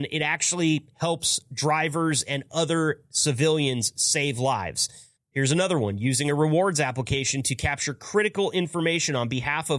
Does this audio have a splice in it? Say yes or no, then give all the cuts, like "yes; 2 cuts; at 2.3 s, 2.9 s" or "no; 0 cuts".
yes; 1 cut; at 5.2 s